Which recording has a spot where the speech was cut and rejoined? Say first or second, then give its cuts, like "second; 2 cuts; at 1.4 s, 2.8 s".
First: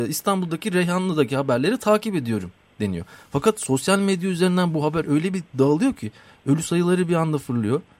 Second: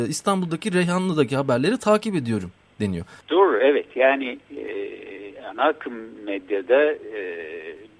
second; 1 cut; at 3.2 s